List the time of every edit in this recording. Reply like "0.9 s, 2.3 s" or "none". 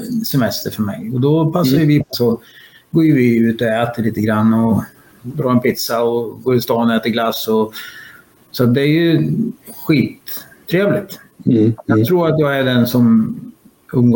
2.1 s

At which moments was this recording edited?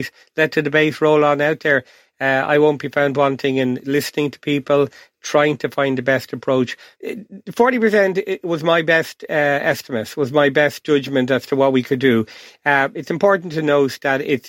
6.9 s

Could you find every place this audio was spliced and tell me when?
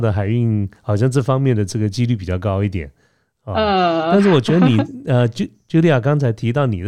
none

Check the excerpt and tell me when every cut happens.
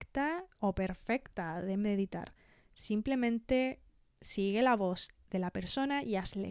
none

